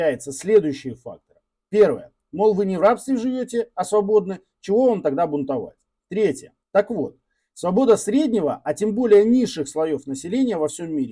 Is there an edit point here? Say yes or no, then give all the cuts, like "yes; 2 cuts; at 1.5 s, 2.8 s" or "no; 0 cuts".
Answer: yes; 2 cuts; at 2.2 s, 6.6 s